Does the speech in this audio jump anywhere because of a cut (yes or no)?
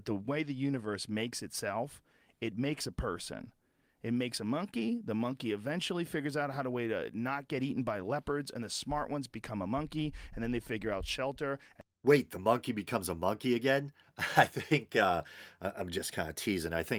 no